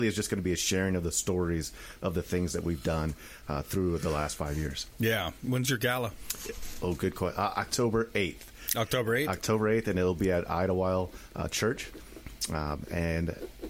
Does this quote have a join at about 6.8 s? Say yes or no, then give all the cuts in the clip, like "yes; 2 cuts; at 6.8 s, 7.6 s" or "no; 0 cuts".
no; 0 cuts